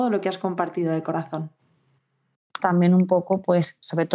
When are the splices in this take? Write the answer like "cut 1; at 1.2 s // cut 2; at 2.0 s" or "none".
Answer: cut 1; at 2.6 s